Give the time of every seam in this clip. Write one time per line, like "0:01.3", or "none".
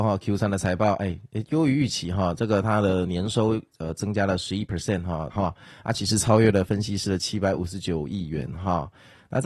0:05.3